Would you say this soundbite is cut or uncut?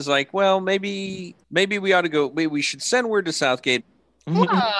cut